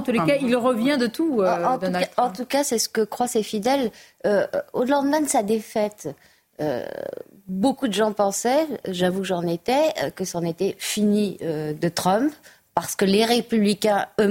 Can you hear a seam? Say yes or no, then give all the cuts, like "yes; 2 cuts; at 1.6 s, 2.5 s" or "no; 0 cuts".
no; 0 cuts